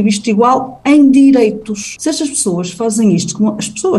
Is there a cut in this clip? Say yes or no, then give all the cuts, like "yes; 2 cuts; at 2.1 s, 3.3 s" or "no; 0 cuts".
no; 0 cuts